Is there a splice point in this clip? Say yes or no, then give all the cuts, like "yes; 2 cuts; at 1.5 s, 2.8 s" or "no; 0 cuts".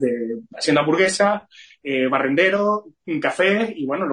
no; 0 cuts